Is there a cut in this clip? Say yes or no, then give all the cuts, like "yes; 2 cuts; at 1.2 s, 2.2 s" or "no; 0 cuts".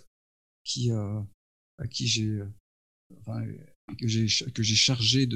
no; 0 cuts